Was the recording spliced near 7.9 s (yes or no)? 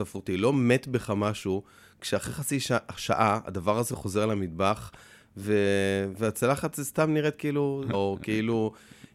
yes